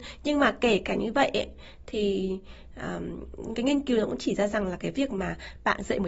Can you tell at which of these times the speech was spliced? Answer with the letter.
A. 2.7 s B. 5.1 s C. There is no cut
C